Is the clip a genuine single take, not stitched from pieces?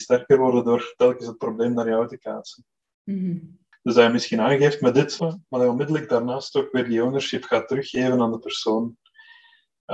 no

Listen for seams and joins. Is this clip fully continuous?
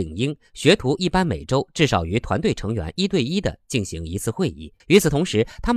no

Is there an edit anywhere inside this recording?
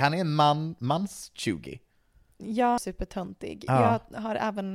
yes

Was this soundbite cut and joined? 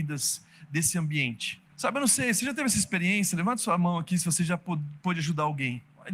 yes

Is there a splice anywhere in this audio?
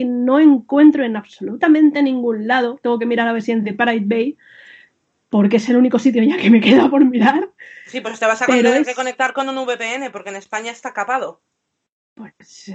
no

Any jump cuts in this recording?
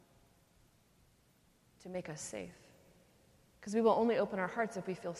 no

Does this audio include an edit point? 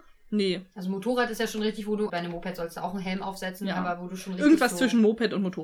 yes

